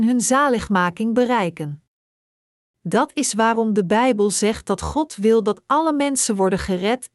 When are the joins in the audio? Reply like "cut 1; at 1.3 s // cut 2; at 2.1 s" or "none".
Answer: none